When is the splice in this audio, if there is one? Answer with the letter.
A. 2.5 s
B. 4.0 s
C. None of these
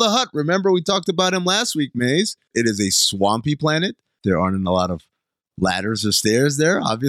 A